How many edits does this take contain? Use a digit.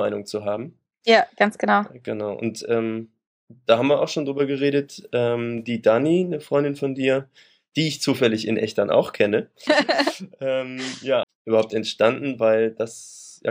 2